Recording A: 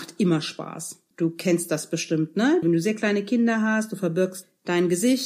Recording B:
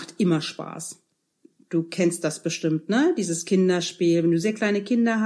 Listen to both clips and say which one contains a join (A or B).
A